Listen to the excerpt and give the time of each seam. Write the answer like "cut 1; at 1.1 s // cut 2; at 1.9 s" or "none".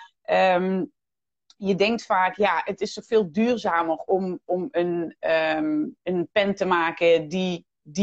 none